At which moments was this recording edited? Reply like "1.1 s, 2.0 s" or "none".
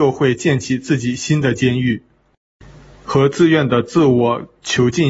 none